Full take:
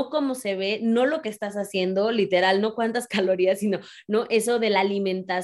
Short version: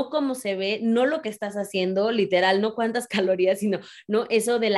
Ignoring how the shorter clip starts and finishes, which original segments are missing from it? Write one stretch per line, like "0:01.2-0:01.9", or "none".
none